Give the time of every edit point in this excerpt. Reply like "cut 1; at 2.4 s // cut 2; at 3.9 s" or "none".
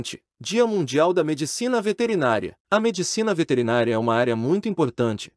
cut 1; at 2.6 s